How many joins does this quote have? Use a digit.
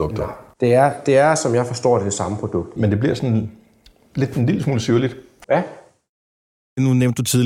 2